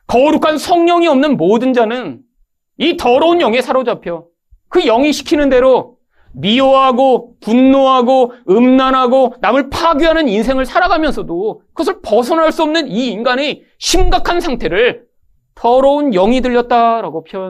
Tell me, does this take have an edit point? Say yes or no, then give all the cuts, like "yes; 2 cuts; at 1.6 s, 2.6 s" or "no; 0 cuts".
no; 0 cuts